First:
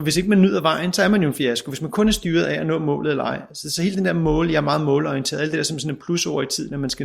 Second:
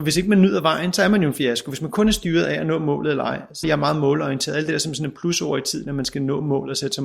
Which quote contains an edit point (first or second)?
second